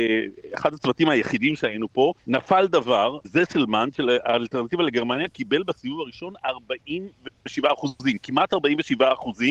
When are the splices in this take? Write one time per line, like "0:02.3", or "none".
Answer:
0:02.2
0:03.2

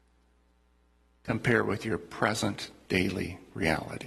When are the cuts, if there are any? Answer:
none

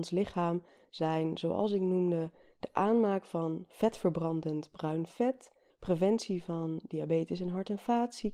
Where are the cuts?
0:05.7

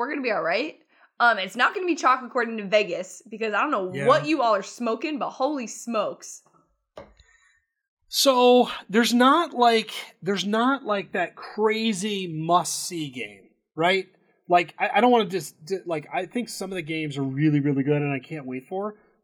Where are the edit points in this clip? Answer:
none

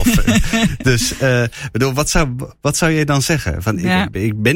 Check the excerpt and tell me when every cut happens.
none

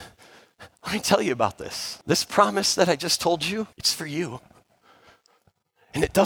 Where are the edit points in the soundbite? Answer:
0:02.0
0:03.7

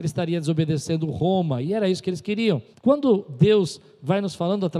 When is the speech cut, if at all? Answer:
0:02.7

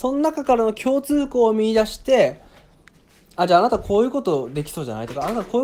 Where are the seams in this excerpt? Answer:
none

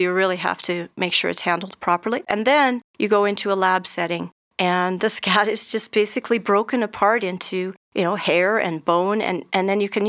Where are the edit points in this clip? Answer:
0:02.3

